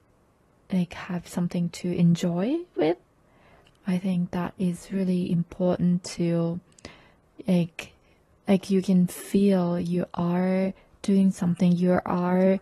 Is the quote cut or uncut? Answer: uncut